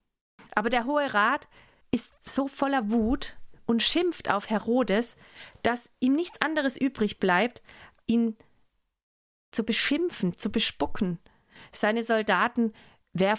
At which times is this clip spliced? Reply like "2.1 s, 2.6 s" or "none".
8.0 s